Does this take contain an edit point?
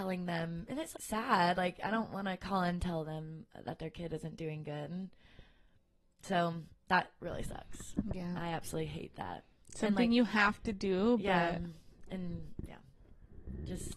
yes; 1 cut; at 0.9 s

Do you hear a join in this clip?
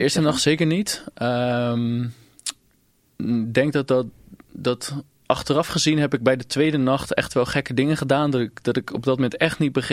no; 0 cuts

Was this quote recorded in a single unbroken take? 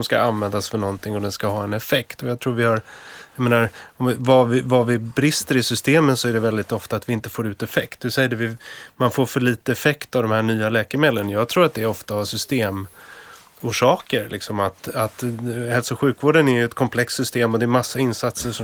yes; 0 cuts

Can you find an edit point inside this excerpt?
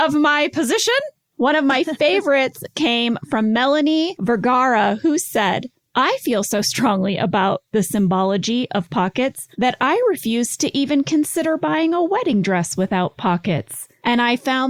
yes; 1 cut; at 5.9 s

